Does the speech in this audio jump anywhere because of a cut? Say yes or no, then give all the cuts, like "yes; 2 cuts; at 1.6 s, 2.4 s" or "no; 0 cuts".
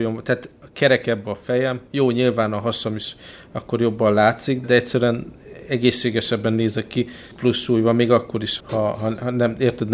yes; 3 cuts; at 4.6 s, 7.3 s, 8.6 s